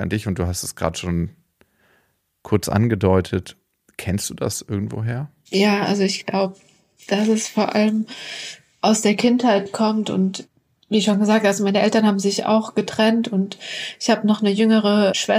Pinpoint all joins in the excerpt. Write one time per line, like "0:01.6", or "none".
none

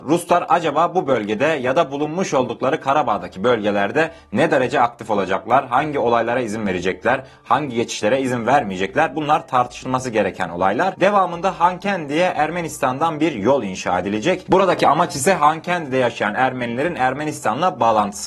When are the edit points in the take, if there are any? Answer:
none

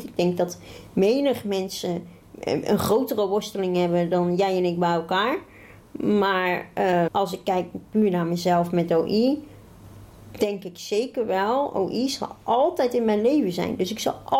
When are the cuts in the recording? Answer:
0:07.1

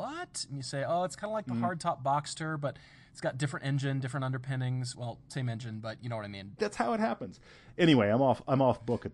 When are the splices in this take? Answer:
0:06.6

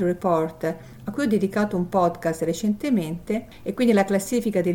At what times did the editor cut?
none

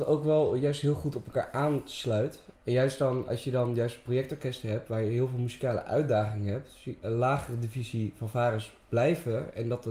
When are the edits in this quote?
0:02.5
0:07.0

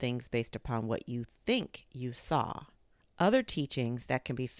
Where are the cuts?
0:03.0

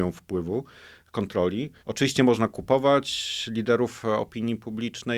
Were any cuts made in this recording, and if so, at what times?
0:01.8

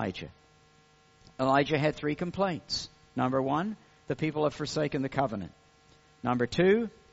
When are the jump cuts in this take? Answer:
none

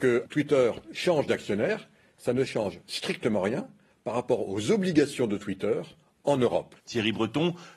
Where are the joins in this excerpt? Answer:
0:06.8

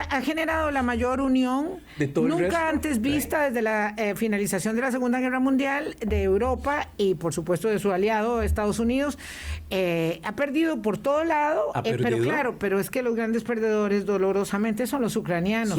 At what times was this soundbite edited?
none

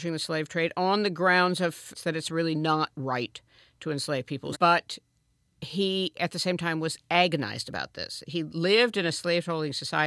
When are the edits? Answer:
0:01.9
0:04.5

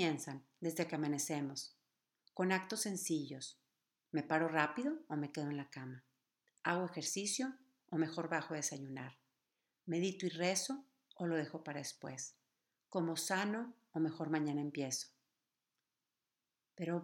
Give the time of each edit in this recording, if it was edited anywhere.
none

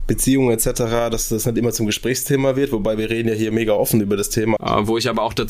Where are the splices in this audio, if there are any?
0:04.6

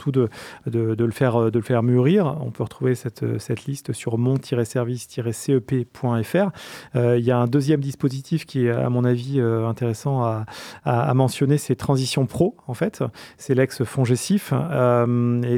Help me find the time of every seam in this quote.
none

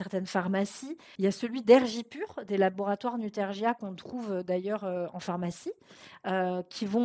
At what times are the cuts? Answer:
0:01.2

